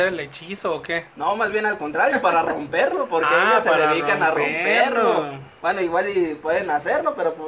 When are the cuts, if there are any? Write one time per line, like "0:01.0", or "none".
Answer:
none